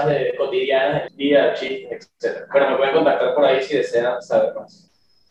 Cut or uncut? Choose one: cut